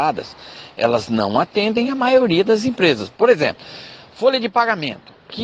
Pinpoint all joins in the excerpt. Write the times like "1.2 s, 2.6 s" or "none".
none